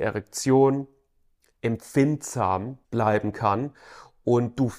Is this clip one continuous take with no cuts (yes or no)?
no